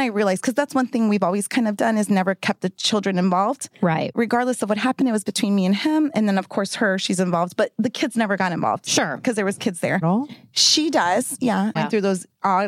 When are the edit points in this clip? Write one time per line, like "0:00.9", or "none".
0:10.0
0:11.8

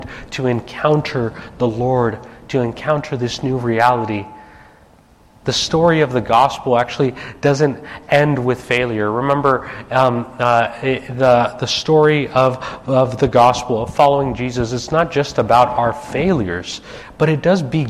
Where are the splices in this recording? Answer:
none

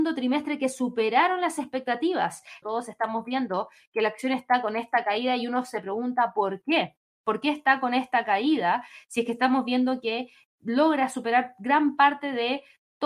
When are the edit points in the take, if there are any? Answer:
0:02.6

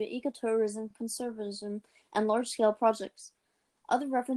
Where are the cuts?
none

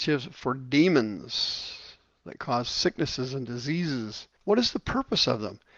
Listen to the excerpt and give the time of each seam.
0:04.4

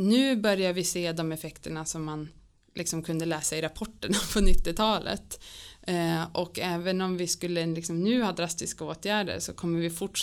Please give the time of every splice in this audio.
none

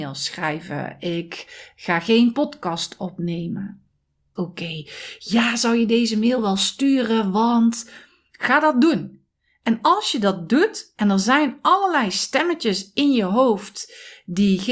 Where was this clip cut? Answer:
0:04.4

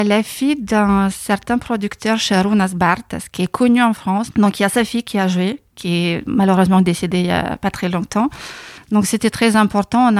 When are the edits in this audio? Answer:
0:04.3
0:08.8

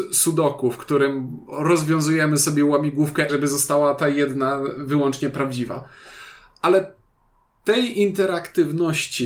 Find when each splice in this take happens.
0:03.3

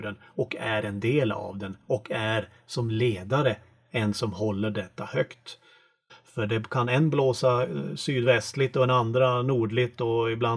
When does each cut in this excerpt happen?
0:06.1

